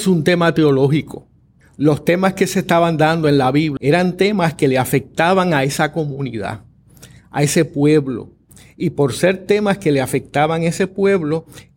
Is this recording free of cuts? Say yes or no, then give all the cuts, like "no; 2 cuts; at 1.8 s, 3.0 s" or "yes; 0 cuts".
no; 2 cuts; at 1.6 s, 3.8 s